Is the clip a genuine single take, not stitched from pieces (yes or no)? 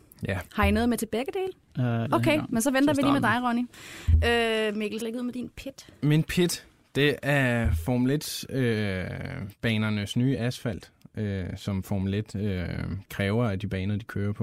no